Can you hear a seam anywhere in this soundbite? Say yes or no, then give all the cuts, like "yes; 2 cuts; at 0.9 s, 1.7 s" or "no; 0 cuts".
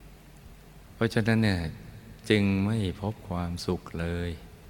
no; 0 cuts